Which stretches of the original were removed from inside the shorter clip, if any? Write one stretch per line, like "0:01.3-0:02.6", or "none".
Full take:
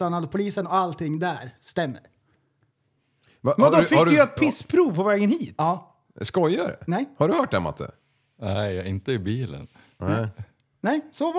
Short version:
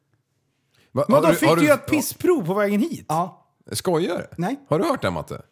none